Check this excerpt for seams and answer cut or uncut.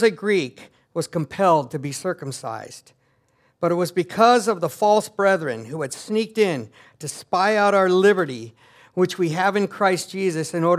uncut